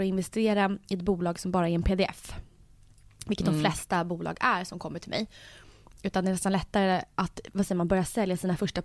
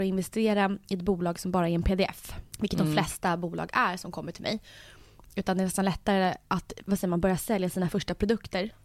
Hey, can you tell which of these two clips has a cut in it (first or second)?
second